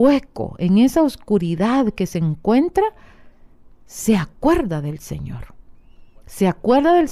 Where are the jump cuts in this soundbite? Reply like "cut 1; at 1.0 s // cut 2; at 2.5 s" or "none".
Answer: none